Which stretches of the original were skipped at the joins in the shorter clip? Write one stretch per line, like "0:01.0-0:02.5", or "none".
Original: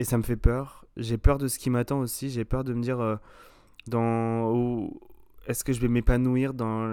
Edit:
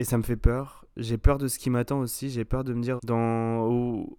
0:03.0-0:03.8